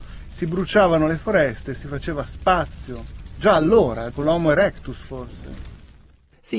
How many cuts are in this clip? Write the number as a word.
one